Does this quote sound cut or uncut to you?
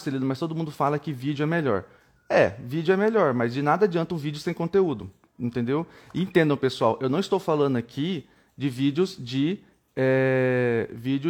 uncut